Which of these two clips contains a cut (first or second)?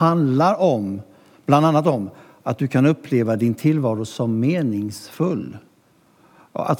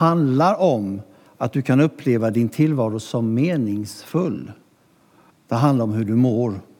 second